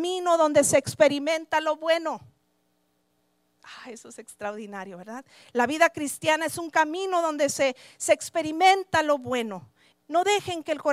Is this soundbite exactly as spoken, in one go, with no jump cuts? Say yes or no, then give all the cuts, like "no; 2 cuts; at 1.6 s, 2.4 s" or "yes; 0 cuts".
no; 1 cut; at 9.9 s